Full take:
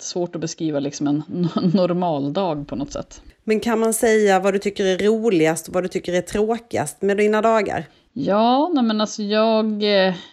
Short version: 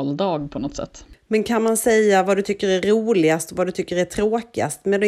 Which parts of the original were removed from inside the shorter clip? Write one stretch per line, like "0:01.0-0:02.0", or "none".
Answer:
none